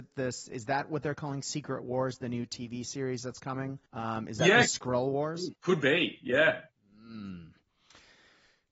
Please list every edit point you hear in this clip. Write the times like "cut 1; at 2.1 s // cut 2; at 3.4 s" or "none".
cut 1; at 3.9 s // cut 2; at 5.6 s